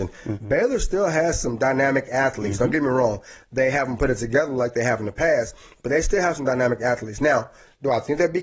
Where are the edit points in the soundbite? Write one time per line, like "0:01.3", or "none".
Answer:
none